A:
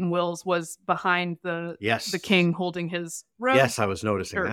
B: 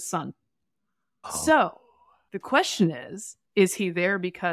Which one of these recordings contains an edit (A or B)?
B